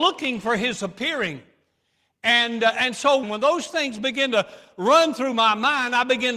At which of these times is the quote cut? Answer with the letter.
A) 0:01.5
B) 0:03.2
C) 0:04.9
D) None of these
B